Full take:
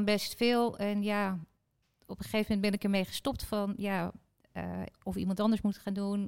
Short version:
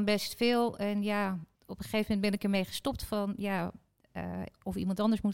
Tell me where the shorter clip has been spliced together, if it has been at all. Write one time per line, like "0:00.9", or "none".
0:01.5